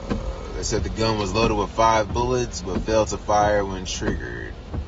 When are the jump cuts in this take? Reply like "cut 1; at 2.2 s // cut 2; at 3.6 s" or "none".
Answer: none